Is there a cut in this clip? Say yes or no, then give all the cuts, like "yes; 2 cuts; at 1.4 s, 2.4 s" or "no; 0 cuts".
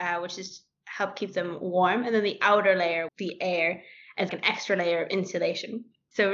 yes; 2 cuts; at 3.1 s, 4.3 s